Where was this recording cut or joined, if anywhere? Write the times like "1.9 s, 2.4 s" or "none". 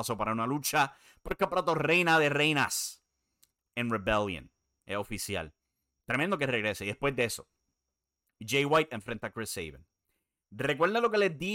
none